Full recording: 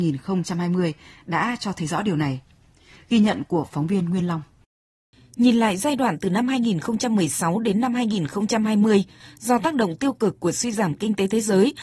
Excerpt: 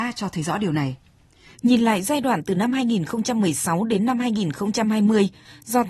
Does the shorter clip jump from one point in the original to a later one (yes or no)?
yes